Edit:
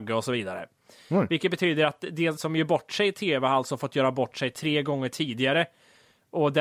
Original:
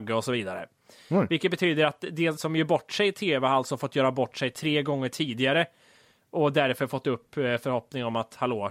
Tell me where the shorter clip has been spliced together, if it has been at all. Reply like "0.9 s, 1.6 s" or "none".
none